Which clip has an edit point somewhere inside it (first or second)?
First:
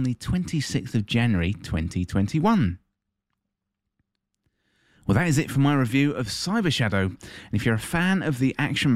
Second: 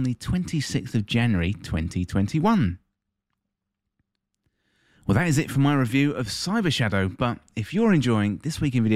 first